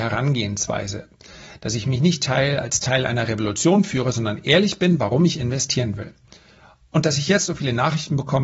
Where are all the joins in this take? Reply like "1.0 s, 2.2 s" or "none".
none